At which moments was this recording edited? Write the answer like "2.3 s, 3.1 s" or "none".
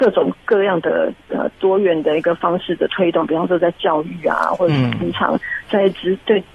none

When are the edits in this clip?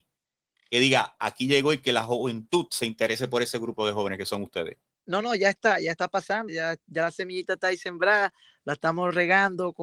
6.5 s

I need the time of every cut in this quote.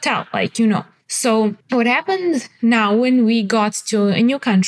1.6 s

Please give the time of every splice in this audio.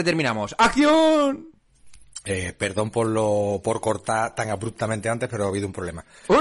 none

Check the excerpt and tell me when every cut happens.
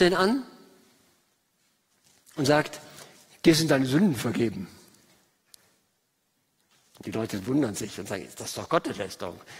none

